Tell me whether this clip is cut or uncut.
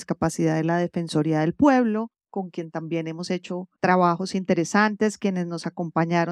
cut